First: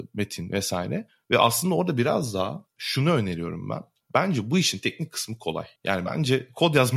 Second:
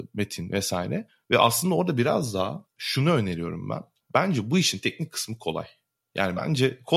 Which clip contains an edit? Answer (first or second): first